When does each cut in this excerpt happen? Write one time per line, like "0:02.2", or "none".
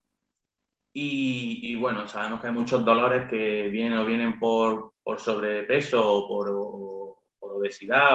none

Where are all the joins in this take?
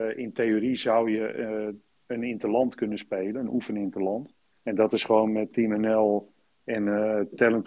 0:04.5

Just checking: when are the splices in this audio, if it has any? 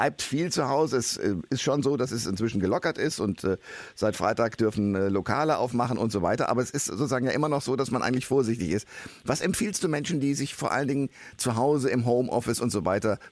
none

